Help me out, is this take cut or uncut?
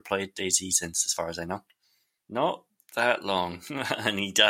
cut